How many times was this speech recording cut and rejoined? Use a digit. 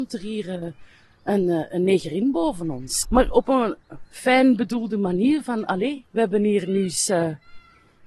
1